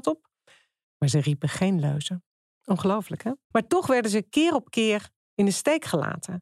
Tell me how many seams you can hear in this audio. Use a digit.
2